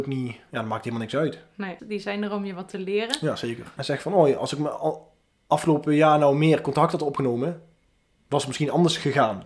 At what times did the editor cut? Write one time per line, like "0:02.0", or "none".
0:01.8
0:03.8

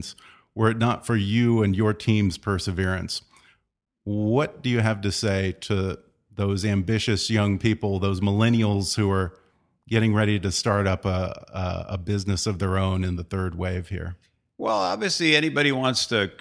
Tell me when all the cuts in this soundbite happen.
none

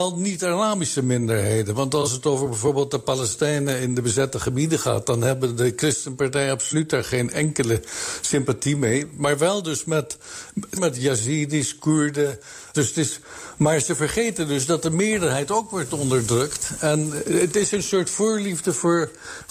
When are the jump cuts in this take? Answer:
0:10.8
0:12.7

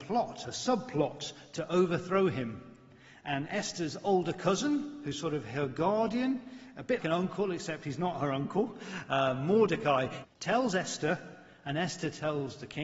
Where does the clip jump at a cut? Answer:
0:07.0
0:10.2

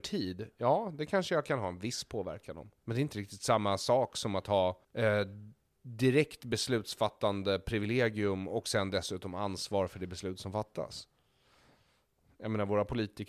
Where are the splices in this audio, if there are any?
0:02.8
0:04.8

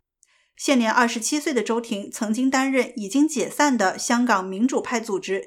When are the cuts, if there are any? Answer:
none

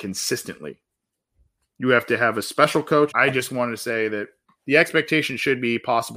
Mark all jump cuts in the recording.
0:03.1
0:04.6

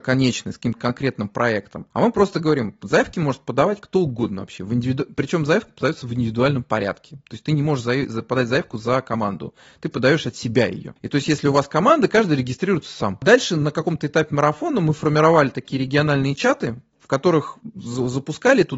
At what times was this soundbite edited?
none

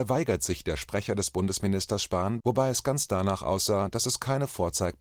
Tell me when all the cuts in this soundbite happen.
0:02.4

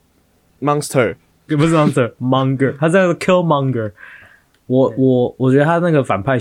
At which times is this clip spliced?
0:01.5

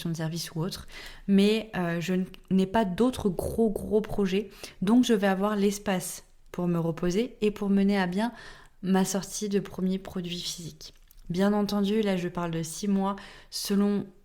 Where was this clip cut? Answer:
none

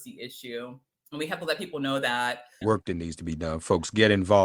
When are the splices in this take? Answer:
0:02.6

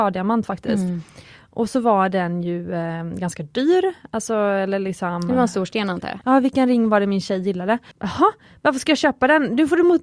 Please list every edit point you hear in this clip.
0:06.2
0:07.9

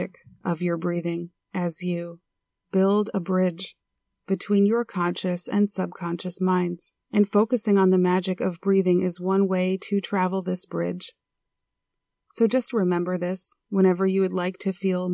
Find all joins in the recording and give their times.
0:01.4
0:07.0
0:13.6

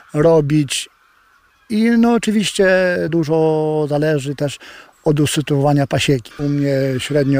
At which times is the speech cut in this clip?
0:03.1
0:06.3

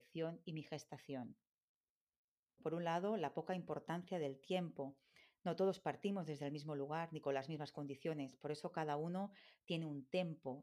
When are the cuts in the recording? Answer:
0:02.6

